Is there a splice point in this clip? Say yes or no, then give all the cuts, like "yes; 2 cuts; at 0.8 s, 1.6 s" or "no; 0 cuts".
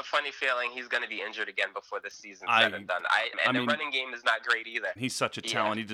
yes; 2 cuts; at 3.3 s, 5.0 s